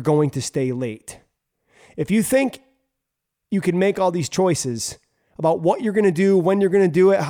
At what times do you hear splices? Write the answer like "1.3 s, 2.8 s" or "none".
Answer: none